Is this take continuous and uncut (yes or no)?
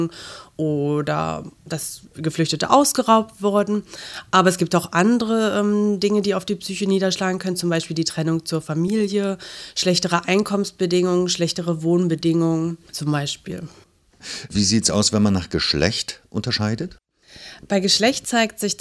yes